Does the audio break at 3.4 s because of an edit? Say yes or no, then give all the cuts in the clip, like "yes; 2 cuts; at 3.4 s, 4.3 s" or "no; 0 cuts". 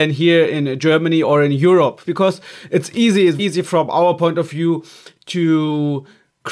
yes; 2 cuts; at 2.0 s, 3.4 s